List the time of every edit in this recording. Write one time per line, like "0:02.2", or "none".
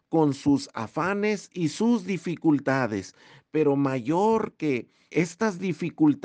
0:05.1